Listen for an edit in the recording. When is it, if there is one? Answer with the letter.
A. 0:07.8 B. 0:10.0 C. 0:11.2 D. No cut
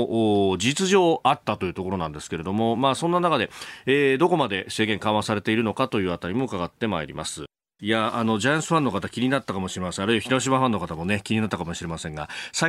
A